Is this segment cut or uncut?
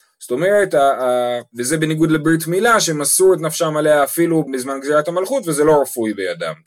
cut